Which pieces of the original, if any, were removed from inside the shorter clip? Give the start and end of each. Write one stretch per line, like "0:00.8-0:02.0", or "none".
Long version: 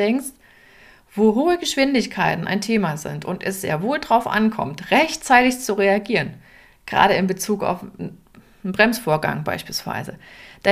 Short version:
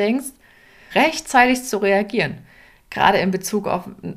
0:00.9-0:04.9